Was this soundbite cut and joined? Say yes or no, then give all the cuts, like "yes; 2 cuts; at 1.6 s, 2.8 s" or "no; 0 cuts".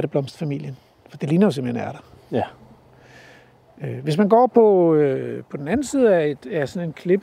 no; 0 cuts